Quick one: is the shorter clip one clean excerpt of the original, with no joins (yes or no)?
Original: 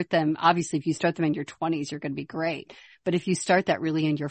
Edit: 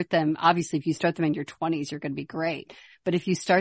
yes